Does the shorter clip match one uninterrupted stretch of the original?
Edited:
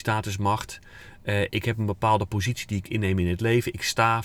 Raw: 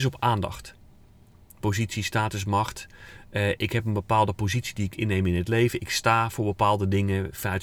yes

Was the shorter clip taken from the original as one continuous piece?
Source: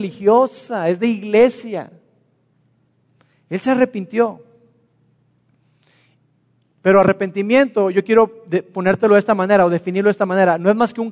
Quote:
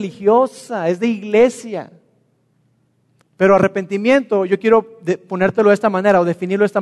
no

